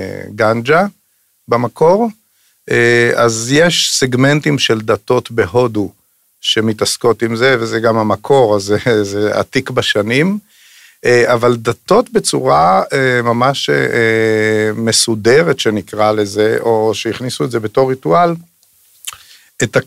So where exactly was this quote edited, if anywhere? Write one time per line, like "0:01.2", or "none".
none